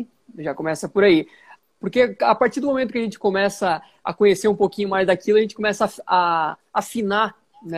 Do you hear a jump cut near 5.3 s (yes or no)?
no